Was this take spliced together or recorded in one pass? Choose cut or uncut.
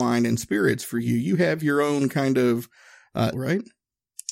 cut